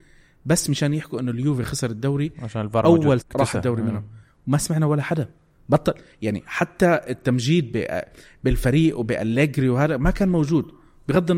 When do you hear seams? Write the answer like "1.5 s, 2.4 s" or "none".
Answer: 3.2 s